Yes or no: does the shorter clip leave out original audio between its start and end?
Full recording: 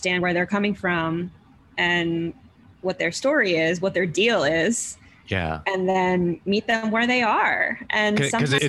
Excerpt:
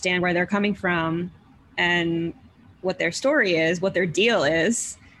no